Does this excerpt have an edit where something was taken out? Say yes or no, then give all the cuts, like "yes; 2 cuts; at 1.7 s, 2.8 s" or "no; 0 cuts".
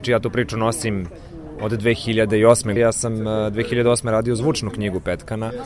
yes; 1 cut; at 2.8 s